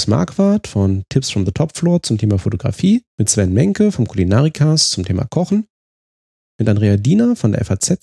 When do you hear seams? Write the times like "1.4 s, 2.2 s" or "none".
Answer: 3.1 s, 6.4 s